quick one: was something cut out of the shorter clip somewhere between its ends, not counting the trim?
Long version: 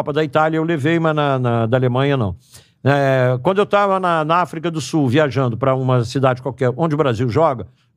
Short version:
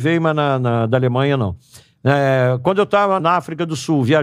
yes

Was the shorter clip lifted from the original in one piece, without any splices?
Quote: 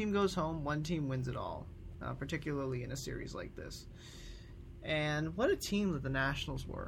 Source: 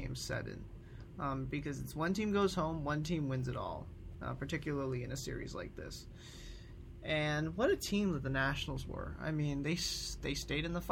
yes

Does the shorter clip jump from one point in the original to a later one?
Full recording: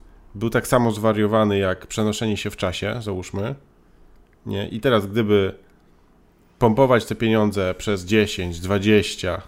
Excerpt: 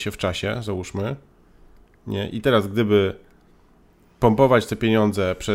no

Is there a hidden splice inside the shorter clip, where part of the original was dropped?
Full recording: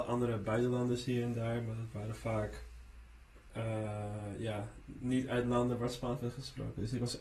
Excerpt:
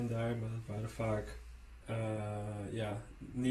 yes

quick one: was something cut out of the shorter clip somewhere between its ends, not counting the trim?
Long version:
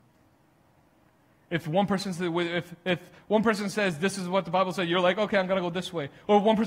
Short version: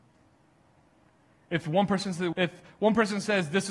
yes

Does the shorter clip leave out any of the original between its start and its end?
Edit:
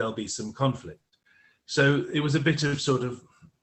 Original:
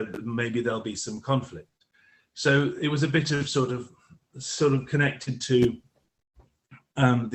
no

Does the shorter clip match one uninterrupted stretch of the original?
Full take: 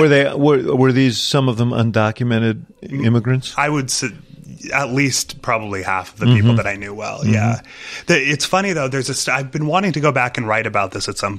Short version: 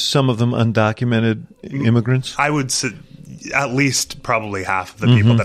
yes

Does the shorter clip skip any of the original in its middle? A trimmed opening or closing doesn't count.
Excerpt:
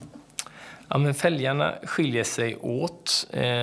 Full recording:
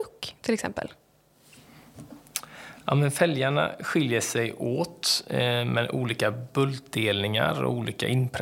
no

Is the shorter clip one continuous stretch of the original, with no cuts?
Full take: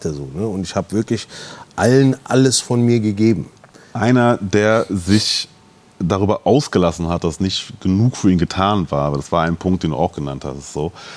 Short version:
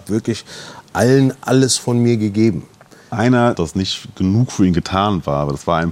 no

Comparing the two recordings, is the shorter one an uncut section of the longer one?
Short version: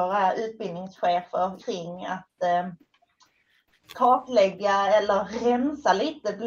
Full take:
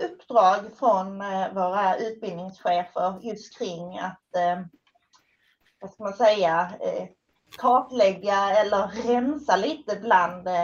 no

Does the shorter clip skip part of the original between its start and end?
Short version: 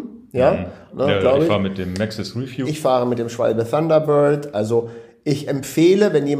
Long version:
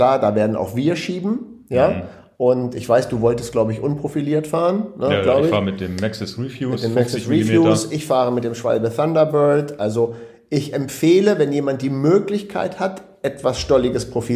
yes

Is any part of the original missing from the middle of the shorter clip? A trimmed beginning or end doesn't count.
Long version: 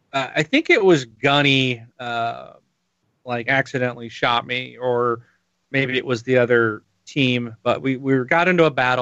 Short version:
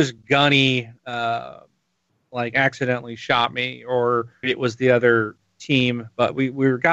yes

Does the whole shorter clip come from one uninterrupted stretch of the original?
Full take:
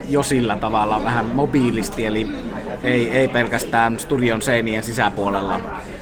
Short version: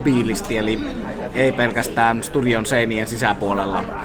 no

